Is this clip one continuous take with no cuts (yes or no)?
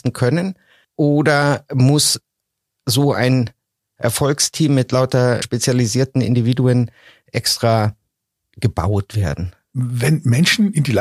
no